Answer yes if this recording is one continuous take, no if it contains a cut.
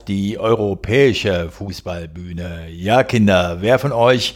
yes